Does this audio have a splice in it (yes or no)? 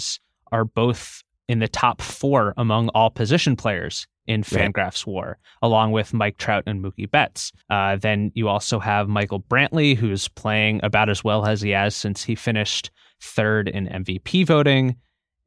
yes